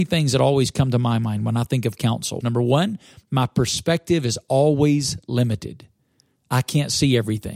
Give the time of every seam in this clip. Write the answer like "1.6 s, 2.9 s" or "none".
2.4 s